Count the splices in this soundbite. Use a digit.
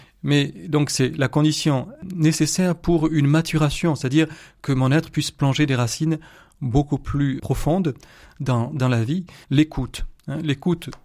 2